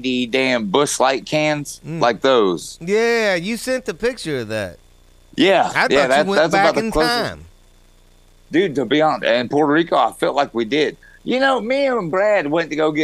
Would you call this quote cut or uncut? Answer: uncut